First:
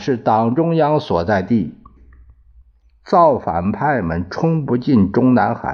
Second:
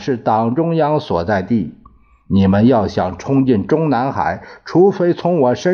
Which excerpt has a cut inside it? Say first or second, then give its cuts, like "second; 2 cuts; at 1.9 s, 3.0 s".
first; 1 cut; at 2.0 s